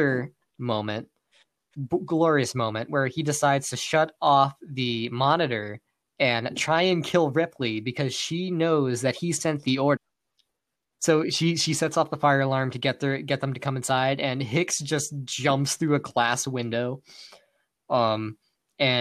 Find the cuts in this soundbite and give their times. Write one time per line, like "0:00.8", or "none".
0:10.0